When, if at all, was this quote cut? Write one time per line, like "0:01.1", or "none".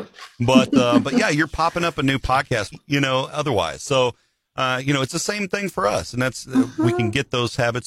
0:02.7